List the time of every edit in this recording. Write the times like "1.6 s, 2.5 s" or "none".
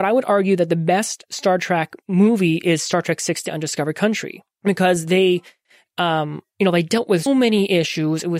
4.5 s, 7.3 s